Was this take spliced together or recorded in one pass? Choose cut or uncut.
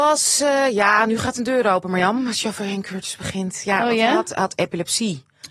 uncut